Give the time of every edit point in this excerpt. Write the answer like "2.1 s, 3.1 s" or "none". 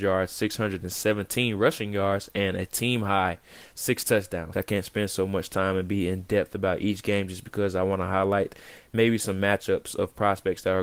4.5 s